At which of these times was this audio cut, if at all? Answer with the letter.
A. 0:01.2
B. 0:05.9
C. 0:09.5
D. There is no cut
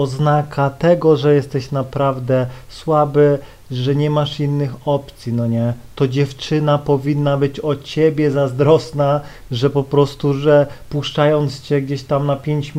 D